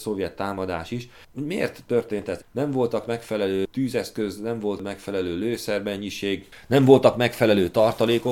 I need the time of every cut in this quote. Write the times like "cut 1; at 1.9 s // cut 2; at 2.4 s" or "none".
cut 1; at 2.4 s